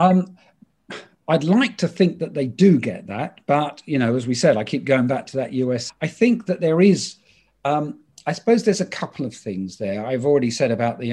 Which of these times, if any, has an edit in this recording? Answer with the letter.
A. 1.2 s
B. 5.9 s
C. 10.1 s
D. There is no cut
B